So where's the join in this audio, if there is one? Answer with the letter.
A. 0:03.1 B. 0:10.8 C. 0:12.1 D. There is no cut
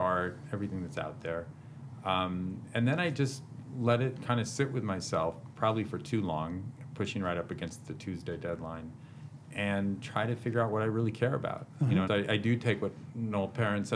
C